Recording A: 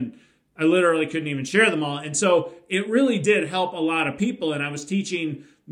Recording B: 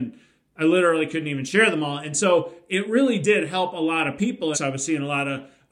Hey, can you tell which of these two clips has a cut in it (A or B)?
B